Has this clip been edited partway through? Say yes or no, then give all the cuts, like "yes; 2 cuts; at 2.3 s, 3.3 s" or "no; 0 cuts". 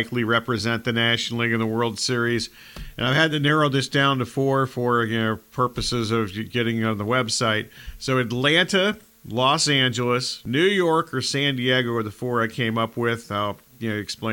no; 0 cuts